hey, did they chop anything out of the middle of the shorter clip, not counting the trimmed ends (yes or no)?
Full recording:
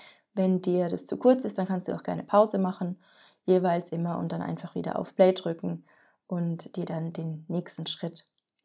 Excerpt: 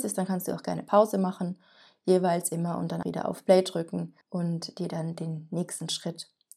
yes